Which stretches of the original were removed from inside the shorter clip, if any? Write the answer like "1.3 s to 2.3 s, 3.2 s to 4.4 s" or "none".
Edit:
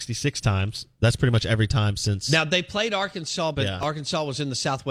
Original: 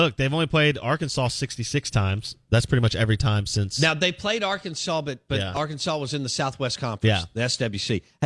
5.0 s to 5.3 s

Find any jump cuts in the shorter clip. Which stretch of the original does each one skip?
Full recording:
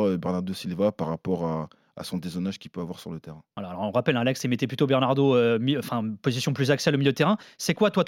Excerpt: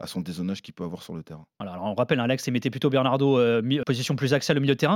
5.8 s to 6.2 s

